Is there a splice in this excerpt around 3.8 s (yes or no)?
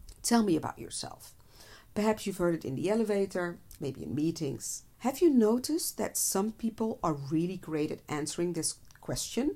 yes